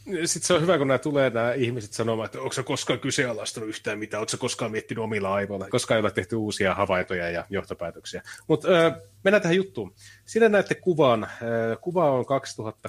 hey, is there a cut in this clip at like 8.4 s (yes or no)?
no